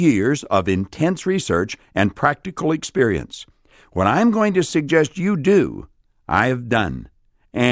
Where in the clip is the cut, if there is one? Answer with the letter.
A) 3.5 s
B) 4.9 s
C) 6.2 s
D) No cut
D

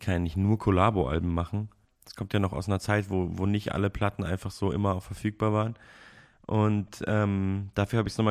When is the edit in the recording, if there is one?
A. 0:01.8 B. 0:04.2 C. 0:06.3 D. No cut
A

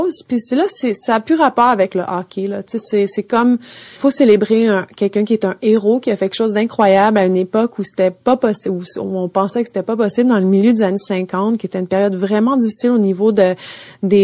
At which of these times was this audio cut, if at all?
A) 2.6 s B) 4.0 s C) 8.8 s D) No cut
B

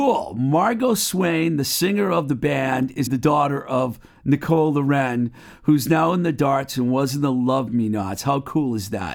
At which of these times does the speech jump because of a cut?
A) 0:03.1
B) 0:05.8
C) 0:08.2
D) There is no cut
A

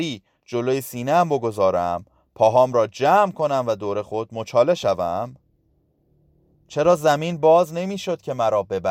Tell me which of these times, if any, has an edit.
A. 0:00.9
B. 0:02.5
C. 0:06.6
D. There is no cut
C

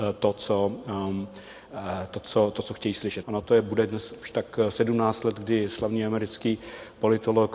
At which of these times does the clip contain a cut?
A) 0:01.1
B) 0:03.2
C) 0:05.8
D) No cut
B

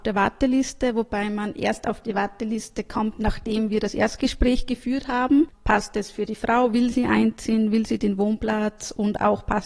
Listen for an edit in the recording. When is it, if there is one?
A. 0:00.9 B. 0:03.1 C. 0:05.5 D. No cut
C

